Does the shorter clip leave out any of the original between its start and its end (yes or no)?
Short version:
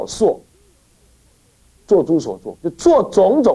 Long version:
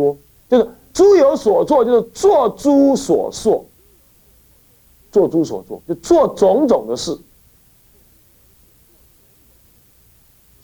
no